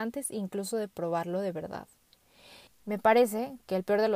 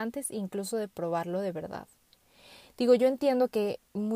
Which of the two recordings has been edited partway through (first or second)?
first